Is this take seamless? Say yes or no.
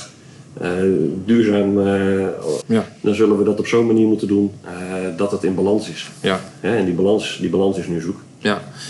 no